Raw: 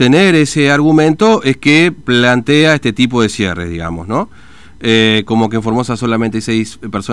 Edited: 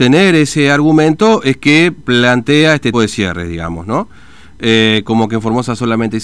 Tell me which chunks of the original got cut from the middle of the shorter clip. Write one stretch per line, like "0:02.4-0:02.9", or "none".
0:02.9-0:03.1